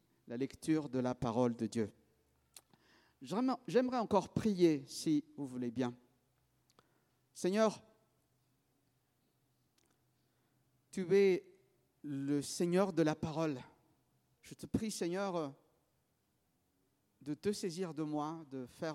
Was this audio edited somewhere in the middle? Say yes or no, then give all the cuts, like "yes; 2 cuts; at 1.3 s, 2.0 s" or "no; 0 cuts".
yes; 1 cut; at 14.4 s